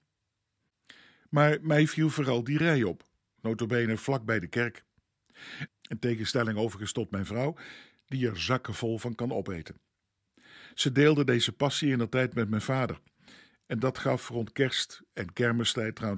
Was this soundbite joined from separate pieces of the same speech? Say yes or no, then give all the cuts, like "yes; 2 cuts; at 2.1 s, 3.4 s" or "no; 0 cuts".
yes; 1 cut; at 5.7 s